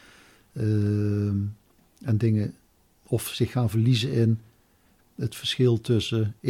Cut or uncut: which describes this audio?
uncut